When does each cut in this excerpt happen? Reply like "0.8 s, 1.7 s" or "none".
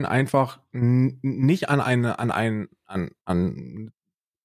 3.2 s